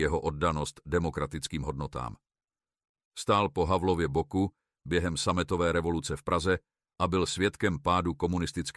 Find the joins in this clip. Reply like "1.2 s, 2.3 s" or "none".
3.0 s